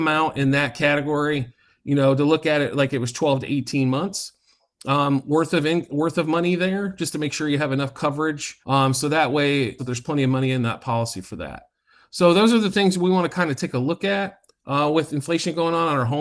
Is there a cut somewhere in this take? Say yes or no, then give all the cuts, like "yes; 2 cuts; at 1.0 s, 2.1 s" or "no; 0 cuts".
yes; 2 cuts; at 8.6 s, 9.8 s